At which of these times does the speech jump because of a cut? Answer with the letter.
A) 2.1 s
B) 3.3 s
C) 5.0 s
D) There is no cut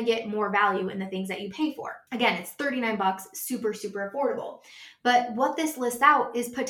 A